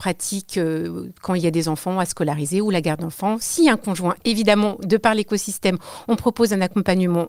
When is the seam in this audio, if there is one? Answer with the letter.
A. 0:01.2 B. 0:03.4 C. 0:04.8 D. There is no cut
D